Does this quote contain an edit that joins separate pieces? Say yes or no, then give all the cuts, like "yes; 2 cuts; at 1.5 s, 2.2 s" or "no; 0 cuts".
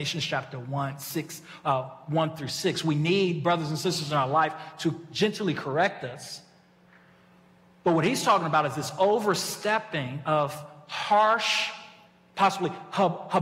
no; 0 cuts